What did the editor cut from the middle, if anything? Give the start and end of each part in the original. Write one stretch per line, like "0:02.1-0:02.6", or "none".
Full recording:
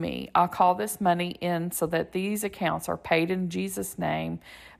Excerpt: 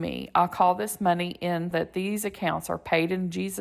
0:01.7-0:01.9